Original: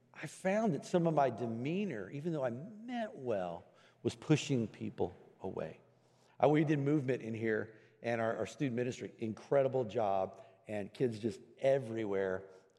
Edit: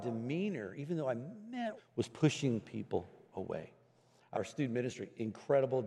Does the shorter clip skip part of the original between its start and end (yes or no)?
yes